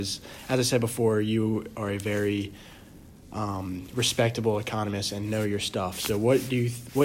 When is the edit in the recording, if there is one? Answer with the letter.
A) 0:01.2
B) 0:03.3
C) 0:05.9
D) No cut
D